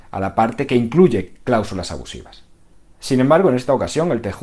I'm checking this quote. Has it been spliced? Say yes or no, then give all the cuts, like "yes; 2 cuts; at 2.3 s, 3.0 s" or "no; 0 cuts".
no; 0 cuts